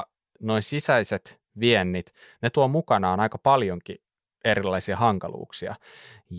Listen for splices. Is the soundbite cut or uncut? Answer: uncut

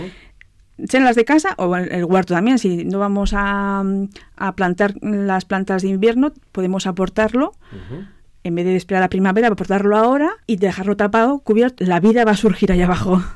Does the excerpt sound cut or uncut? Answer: cut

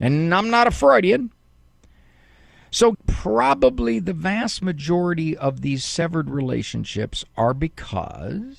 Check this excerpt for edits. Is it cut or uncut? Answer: cut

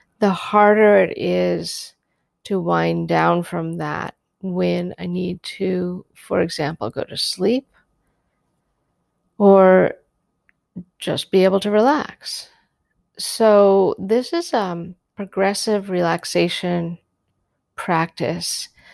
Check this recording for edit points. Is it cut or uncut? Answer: uncut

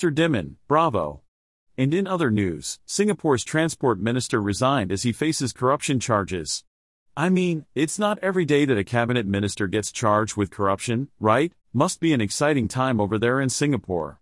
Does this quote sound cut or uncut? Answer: cut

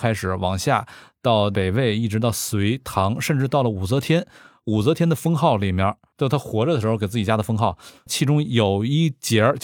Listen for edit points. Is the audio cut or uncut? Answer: cut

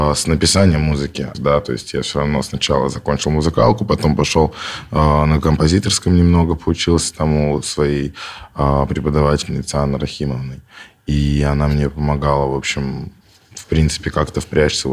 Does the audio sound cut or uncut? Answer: cut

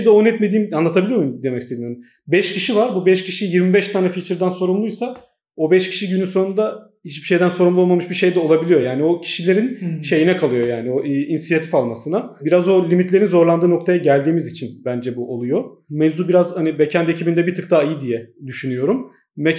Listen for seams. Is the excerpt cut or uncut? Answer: uncut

